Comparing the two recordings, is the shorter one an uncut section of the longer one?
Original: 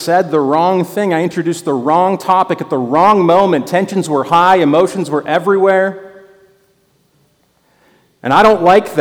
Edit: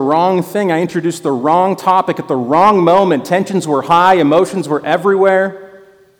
yes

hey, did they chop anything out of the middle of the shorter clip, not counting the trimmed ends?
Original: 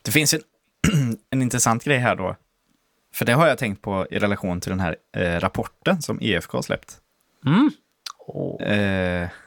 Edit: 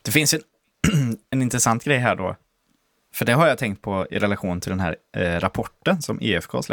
no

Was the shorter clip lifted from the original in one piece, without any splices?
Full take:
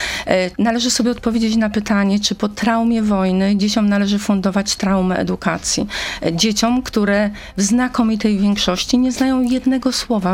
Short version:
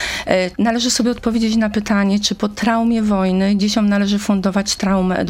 yes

